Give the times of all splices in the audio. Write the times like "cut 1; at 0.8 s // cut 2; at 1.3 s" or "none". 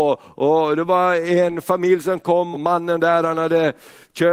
cut 1; at 2.5 s